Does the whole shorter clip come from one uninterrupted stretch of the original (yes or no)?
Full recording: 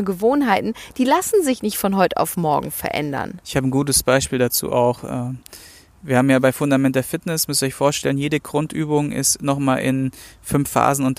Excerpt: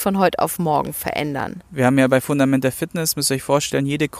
no